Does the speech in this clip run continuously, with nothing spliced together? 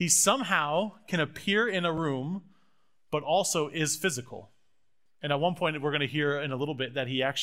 no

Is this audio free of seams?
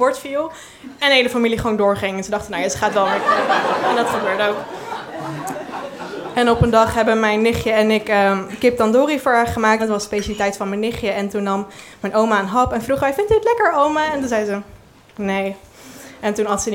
no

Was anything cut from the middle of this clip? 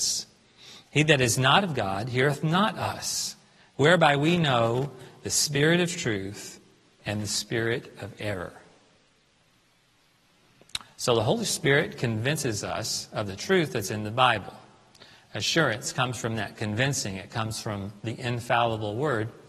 no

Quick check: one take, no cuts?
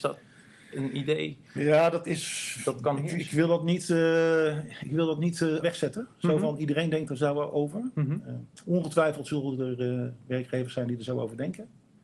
no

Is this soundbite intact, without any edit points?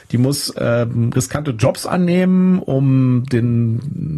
yes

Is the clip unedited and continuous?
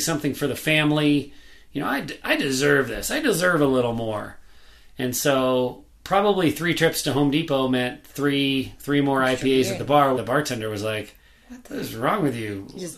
no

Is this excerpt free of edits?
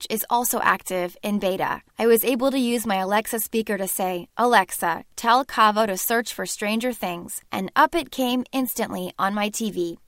yes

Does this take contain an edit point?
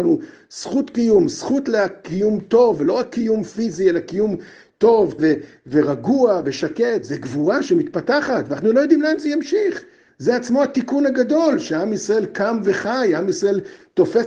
yes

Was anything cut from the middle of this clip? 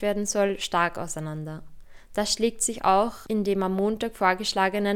no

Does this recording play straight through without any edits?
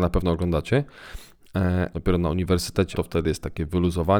no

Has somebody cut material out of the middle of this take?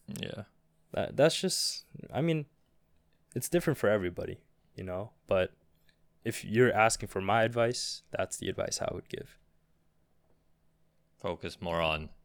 no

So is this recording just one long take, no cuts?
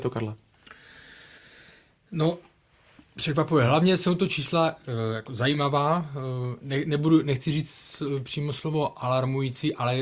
yes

